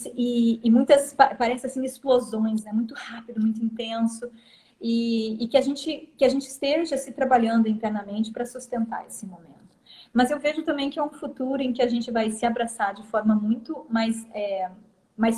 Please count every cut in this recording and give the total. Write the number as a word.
zero